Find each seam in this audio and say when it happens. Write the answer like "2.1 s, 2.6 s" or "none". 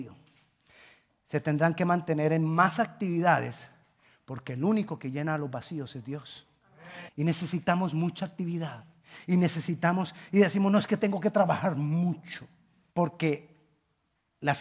7.1 s, 12.9 s